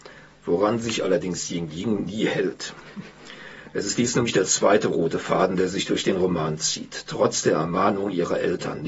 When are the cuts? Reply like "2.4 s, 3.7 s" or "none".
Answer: none